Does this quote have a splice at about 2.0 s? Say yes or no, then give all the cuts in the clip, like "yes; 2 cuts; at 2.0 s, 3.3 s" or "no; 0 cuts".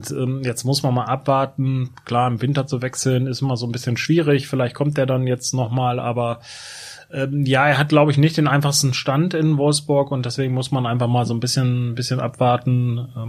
no; 0 cuts